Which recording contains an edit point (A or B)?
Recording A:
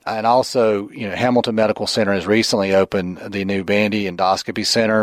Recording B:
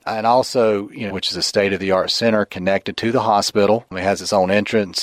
B